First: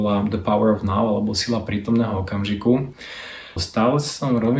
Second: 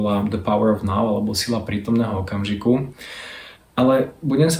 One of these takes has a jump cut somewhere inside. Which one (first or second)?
first